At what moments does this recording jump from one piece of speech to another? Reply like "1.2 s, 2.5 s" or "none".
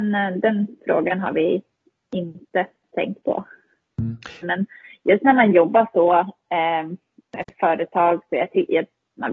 4.4 s

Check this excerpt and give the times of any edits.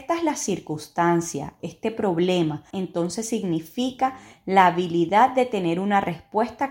1.6 s, 2.7 s

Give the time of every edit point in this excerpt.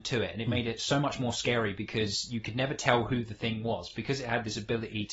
none

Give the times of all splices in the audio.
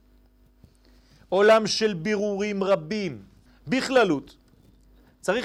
3.5 s

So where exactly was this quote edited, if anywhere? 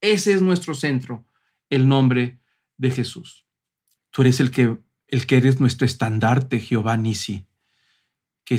4.0 s

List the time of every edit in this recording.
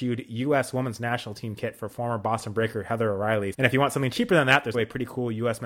3.5 s, 4.7 s

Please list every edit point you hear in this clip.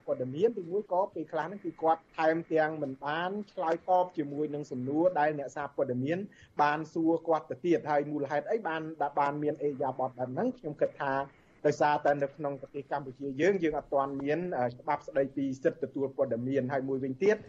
2.1 s

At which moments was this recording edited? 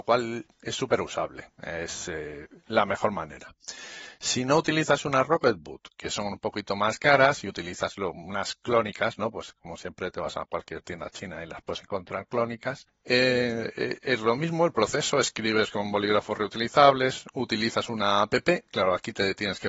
none

